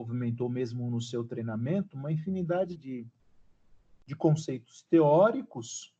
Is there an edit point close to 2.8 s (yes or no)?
yes